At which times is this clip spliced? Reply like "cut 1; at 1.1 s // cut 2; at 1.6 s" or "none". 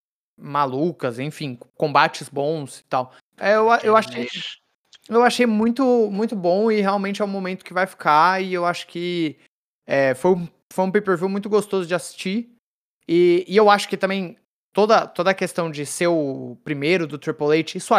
cut 1; at 3.3 s

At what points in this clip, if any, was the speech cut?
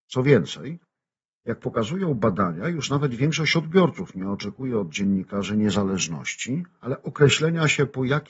none

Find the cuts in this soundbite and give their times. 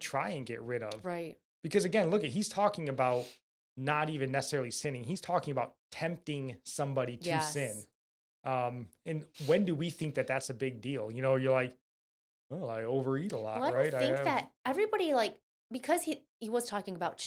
none

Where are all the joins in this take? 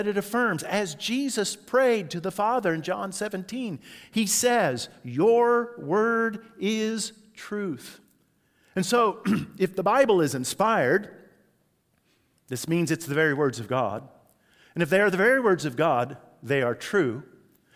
none

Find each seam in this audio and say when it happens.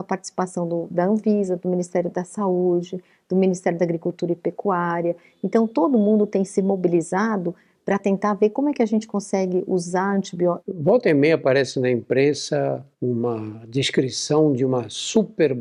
cut 1; at 10.6 s // cut 2; at 12.9 s

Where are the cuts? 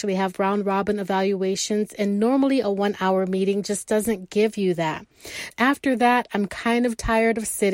cut 1; at 5.5 s

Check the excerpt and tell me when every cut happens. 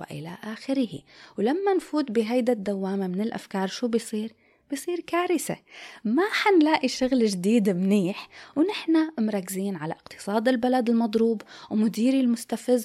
none

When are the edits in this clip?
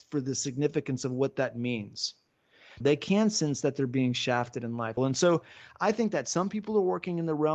cut 1; at 2.8 s // cut 2; at 5.0 s

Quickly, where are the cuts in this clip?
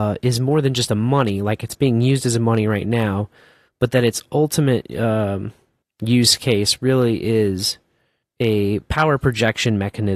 none

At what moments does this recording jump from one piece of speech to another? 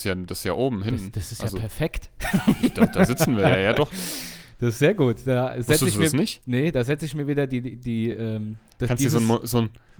none

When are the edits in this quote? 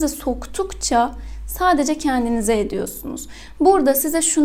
cut 1; at 3.5 s

